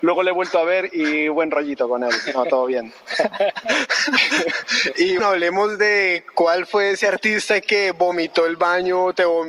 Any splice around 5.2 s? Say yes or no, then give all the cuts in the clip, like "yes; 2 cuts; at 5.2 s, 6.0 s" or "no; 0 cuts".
yes; 1 cut; at 5.2 s